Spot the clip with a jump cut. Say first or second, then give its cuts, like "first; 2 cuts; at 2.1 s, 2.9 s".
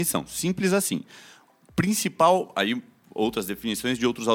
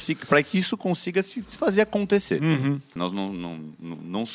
second; 1 cut; at 3.0 s